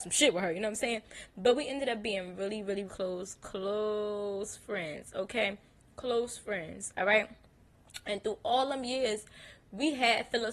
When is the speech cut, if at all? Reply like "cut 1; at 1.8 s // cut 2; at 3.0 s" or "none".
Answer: cut 1; at 2.9 s